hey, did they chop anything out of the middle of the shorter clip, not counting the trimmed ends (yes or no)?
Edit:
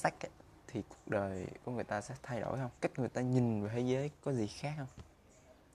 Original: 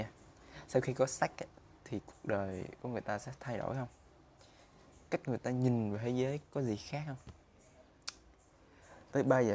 yes